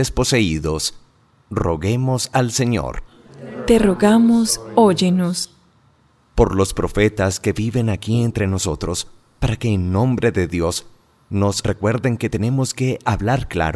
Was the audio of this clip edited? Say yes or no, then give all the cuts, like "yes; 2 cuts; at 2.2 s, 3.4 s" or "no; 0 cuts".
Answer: no; 0 cuts